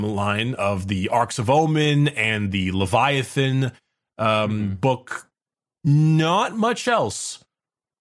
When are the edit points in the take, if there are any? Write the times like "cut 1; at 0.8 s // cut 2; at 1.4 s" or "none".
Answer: none